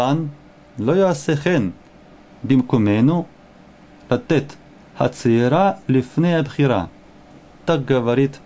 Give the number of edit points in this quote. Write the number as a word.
zero